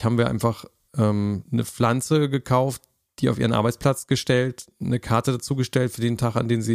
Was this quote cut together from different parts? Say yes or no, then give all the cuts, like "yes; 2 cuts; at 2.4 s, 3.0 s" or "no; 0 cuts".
yes; 1 cut; at 1.4 s